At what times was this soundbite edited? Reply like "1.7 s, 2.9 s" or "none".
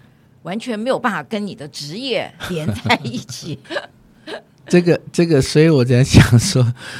3.6 s